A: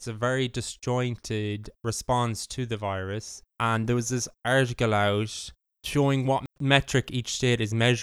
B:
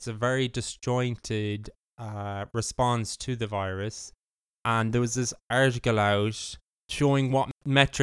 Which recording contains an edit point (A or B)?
A